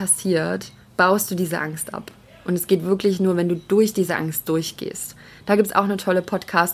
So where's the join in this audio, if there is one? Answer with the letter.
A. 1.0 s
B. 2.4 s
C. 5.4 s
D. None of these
D